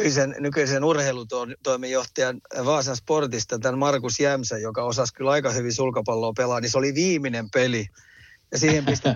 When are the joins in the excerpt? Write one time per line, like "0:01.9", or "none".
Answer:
none